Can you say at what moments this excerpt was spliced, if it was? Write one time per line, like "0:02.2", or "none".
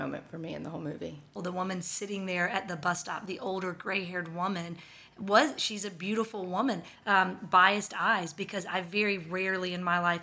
0:01.4
0:07.0